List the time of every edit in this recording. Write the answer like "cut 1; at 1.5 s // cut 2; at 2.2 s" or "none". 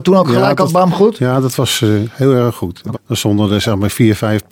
cut 1; at 2.9 s